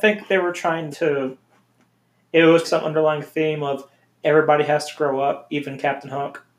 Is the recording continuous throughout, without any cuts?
no; 2 cuts; at 0.9 s, 2.6 s

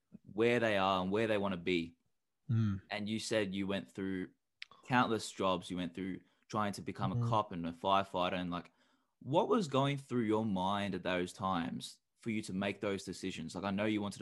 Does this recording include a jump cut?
no; 0 cuts

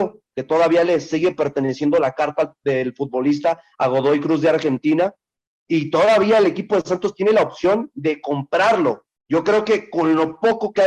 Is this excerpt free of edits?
yes; 0 cuts

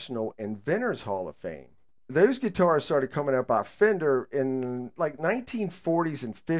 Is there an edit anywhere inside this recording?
yes; 1 cut; at 2.0 s

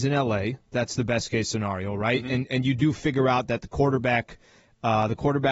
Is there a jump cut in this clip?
no; 0 cuts

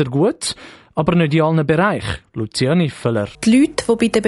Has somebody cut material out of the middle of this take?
yes; 1 cut; at 3.3 s

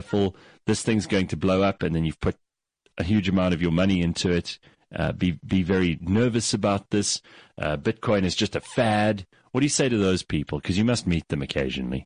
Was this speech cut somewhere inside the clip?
no; 0 cuts

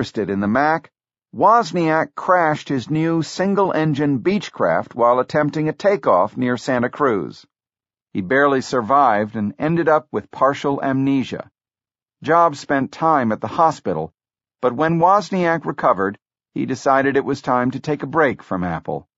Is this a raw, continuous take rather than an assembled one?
yes; 0 cuts

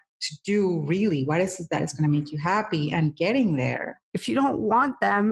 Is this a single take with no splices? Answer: no; 1 cut; at 4.0 s

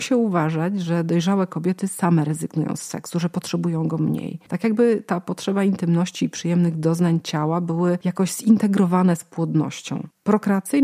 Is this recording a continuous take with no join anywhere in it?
yes; 0 cuts

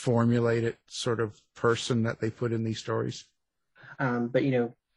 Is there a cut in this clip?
yes; 1 cut; at 3.9 s

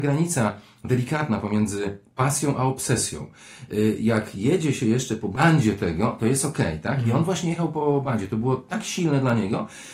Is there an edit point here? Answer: no; 0 cuts

